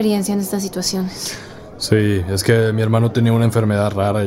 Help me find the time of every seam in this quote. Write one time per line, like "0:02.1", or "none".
none